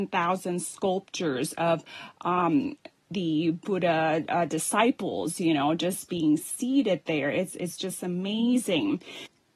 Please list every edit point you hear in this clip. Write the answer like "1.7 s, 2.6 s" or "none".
none